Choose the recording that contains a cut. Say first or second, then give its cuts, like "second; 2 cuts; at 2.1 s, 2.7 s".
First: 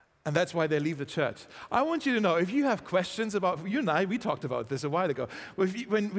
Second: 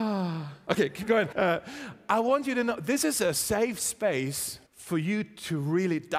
second; 2 cuts; at 1.3 s, 4.7 s